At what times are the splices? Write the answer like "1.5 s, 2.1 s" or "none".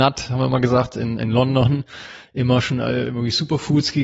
none